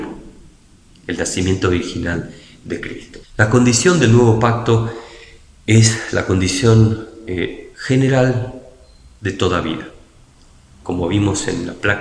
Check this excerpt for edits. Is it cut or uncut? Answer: cut